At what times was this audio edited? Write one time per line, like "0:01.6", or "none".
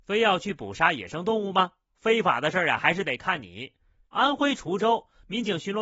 0:01.9
0:04.0

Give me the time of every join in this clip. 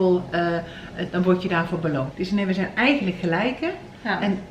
0:01.1
0:02.1

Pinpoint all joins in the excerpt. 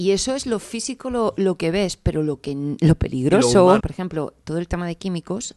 0:03.8

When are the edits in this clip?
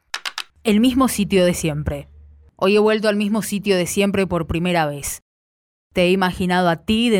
none

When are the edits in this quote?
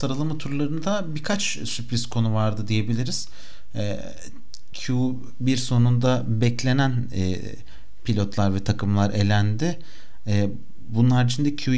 none

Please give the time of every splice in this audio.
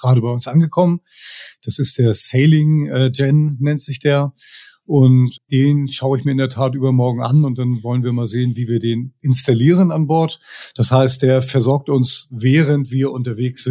0:05.4

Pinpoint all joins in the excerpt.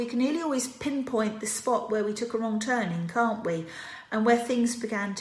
none

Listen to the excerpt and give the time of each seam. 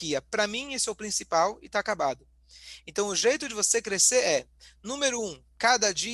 none

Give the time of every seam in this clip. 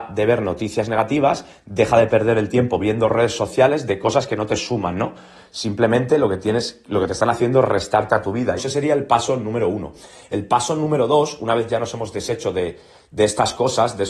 0:08.6

